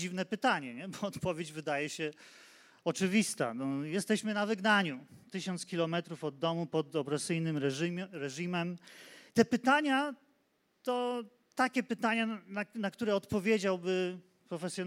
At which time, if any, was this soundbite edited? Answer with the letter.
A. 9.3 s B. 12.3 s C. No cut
A